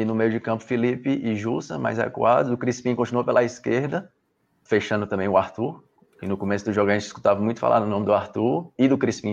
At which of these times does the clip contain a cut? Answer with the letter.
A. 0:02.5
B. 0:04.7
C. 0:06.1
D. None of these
B